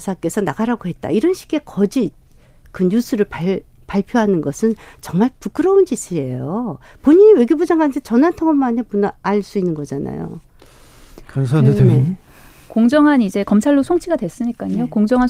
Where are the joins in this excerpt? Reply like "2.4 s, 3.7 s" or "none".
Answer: none